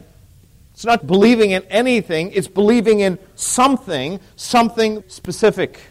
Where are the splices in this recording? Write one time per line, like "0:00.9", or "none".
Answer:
0:01.0
0:05.0